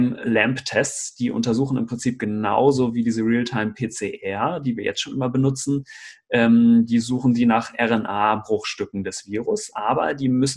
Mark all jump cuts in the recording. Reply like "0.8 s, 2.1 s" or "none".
none